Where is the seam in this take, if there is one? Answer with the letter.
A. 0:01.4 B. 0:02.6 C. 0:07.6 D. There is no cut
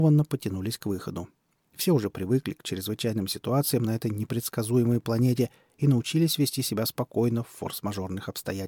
D